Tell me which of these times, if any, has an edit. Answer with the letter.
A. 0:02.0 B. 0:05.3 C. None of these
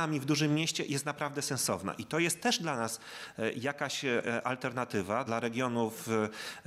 B